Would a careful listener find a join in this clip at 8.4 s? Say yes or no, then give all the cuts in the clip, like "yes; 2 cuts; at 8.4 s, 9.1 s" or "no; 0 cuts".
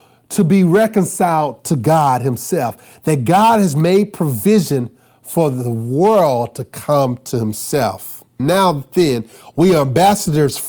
yes; 1 cut; at 8.4 s